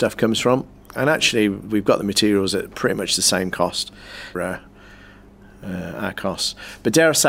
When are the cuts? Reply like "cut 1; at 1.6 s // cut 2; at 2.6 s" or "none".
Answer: cut 1; at 4.3 s